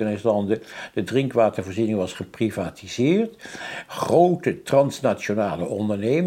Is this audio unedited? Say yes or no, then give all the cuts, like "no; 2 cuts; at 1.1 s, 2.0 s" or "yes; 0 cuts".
yes; 0 cuts